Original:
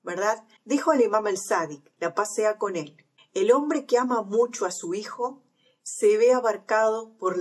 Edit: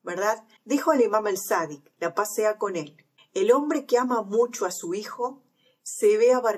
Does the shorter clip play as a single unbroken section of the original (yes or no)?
yes